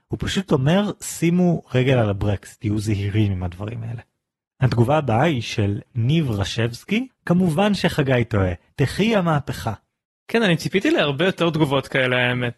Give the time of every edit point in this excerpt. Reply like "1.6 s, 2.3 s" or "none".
7.1 s, 8.7 s